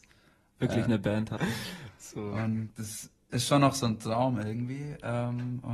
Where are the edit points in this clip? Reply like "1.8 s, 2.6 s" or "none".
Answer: 1.4 s